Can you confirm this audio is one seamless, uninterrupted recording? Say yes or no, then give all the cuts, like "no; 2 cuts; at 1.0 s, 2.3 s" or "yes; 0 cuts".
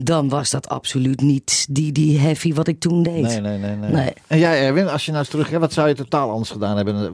yes; 0 cuts